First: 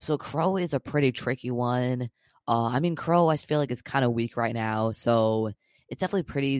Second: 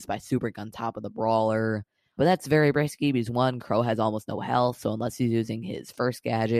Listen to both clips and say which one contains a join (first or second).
second